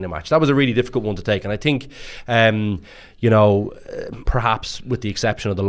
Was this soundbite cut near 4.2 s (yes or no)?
yes